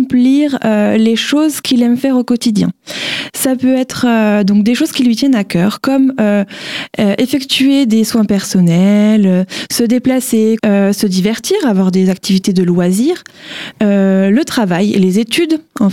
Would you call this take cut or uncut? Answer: cut